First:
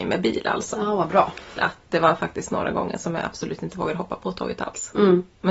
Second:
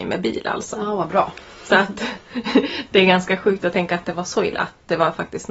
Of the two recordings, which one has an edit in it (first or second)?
first